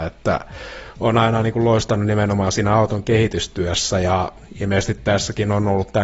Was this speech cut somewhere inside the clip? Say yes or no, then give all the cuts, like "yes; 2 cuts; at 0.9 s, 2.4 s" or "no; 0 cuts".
no; 0 cuts